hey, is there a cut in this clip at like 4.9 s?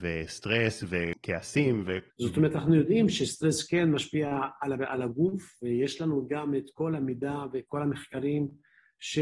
no; 1 cut; at 2.1 s

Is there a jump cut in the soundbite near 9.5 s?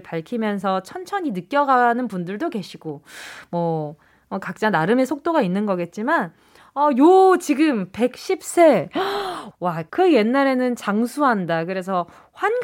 yes; 1 cut; at 9.5 s

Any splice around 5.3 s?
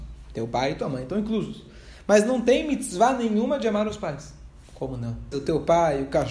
yes; 1 cut; at 5.3 s

